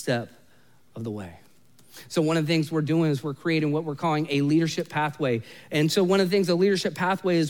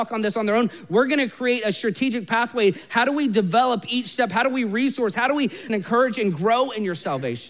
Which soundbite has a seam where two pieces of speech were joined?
second; 1 cut; at 5.7 s

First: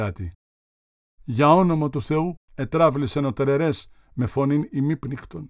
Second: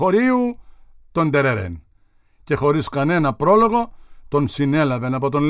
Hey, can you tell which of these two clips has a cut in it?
first; 2 cuts; at 1.2 s, 2.4 s

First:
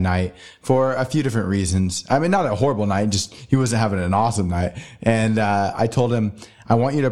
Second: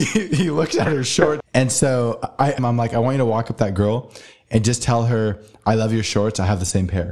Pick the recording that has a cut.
second; 2 cuts; at 1.4 s, 2.6 s

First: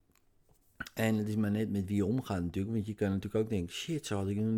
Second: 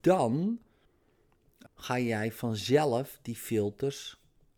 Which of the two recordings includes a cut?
second; 1 cut; at 1.7 s

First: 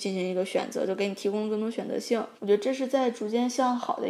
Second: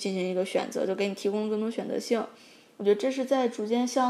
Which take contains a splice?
first; 1 cut; at 2.4 s

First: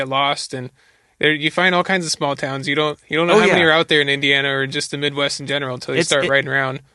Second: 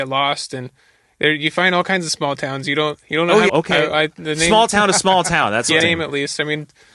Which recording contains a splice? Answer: second; 2 cuts; at 3.5 s, 5.8 s

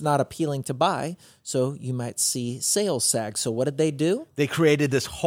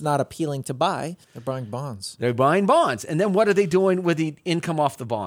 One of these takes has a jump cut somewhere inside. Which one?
second; 1 cut; at 1.2 s

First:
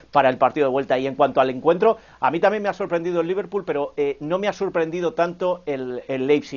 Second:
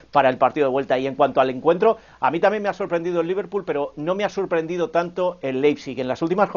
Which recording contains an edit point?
second; 2 cuts; at 3.9 s, 5.4 s

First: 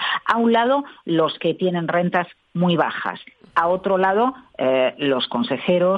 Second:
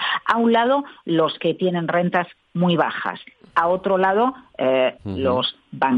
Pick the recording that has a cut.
second; 1 cut; at 5.0 s

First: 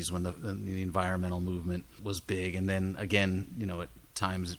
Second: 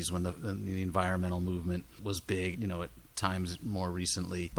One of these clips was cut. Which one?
second; 1 cut; at 2.5 s

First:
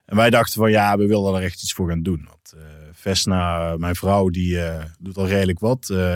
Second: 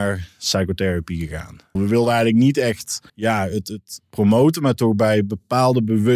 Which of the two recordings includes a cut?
second; 2 cuts; at 1.8 s, 3.1 s

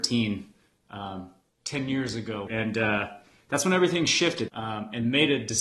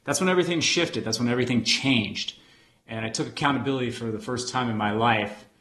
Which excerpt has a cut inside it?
first; 2 cuts; at 2.5 s, 4.5 s

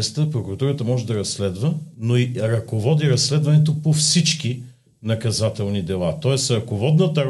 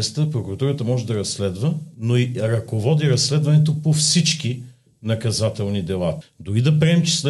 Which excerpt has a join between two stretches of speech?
second; 1 cut; at 6.2 s

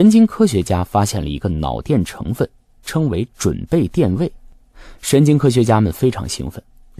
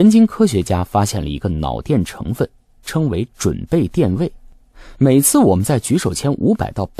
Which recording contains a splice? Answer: first; 1 cut; at 4.9 s

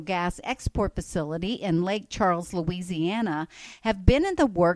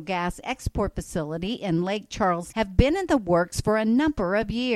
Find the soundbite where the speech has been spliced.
second; 1 cut; at 2.5 s

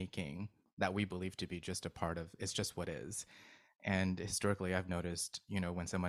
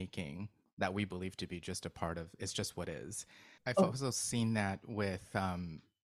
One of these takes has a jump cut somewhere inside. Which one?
second; 1 cut; at 3.6 s

